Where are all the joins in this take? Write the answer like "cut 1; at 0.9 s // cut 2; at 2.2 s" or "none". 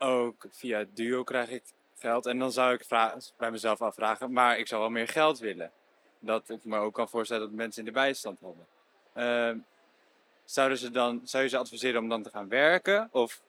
none